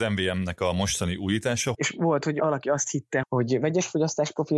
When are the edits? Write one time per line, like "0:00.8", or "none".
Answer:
0:01.7
0:03.2